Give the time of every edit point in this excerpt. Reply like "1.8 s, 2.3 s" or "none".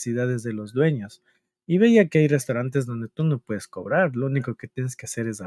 none